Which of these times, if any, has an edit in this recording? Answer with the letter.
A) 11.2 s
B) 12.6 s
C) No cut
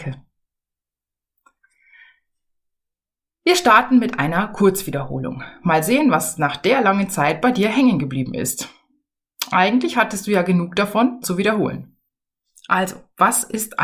A